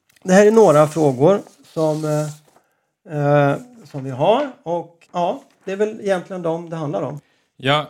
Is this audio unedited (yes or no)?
no